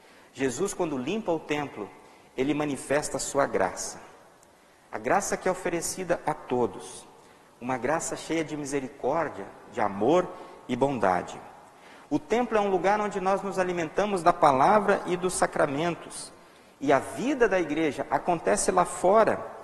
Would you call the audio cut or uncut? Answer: uncut